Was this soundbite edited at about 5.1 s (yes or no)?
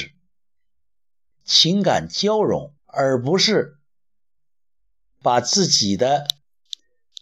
no